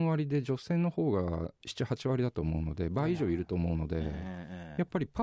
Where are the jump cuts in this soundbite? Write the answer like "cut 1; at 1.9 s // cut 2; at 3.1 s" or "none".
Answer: none